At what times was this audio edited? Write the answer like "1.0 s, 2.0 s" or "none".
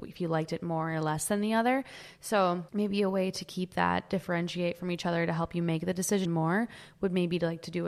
2.7 s, 6.3 s